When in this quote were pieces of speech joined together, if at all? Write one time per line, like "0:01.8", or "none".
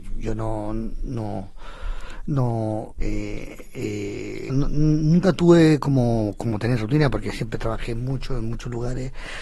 0:03.0
0:04.5